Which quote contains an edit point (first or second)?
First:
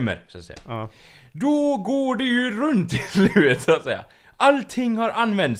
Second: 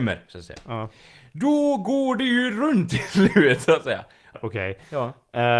second